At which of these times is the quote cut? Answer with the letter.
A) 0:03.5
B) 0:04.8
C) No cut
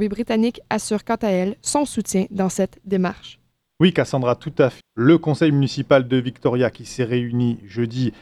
B